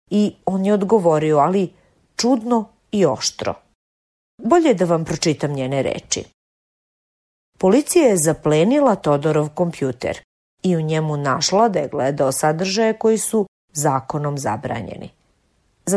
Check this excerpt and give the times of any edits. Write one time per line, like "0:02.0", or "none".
none